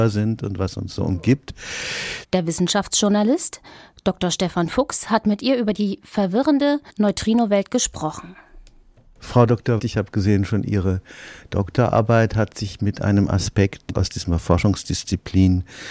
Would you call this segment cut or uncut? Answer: cut